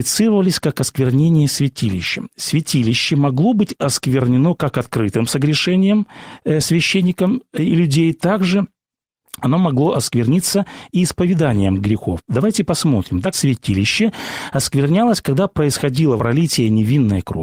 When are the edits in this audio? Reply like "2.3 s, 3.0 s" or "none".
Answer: 13.3 s, 16.2 s

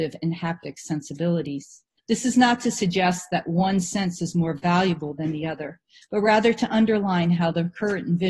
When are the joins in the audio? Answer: 2.0 s

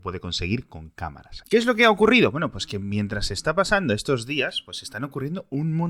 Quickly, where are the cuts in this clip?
1.4 s

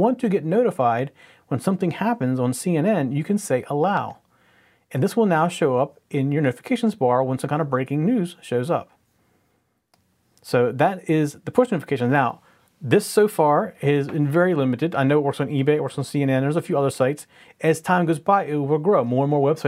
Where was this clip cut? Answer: none

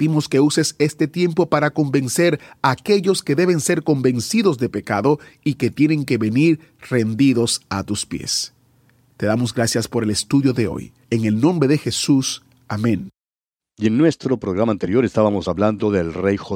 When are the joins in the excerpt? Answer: 11.0 s, 13.6 s

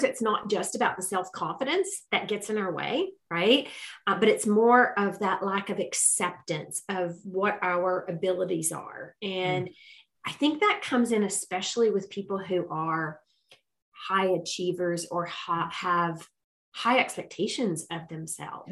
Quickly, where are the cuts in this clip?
none

